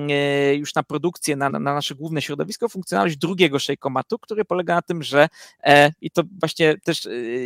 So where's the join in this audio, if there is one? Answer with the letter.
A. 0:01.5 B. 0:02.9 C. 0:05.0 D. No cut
A